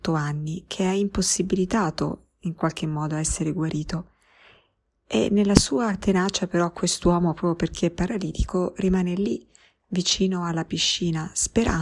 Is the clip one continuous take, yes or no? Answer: yes